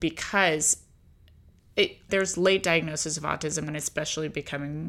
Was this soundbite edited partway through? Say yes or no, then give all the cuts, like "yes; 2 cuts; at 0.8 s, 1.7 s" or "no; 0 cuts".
yes; 2 cuts; at 2.1 s, 3.7 s